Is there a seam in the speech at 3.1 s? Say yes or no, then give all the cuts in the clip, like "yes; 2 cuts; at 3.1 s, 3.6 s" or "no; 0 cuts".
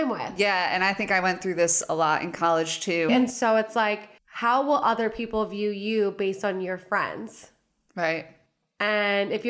yes; 2 cuts; at 3.1 s, 4.2 s